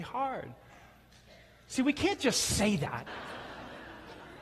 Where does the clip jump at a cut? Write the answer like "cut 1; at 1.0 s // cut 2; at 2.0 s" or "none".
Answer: cut 1; at 3.1 s